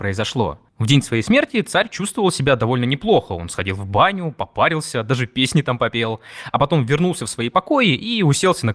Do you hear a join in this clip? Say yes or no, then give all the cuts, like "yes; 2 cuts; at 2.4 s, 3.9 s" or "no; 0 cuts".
no; 0 cuts